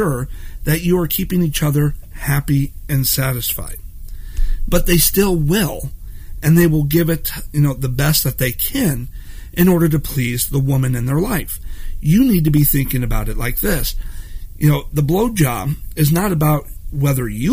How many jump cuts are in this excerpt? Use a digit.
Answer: 1